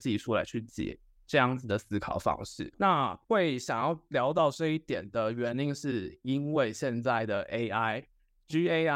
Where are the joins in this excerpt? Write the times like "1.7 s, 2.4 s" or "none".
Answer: 2.7 s

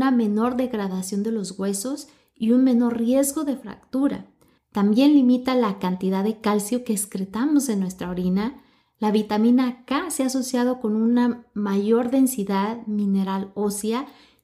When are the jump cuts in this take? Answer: 4.6 s

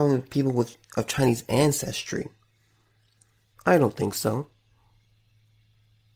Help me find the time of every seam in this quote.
3.5 s

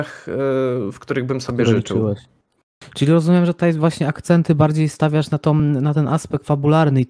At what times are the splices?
none

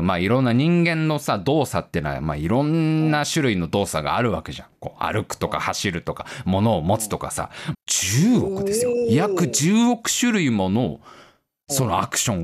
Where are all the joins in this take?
7.7 s

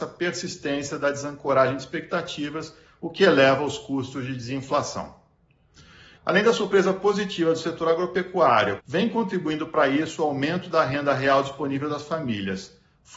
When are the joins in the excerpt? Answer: 6.2 s, 8.8 s

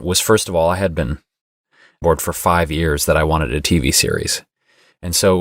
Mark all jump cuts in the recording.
2.0 s

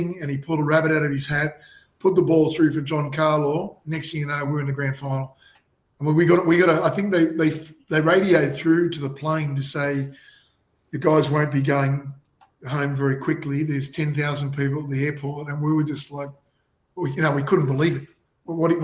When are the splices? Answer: none

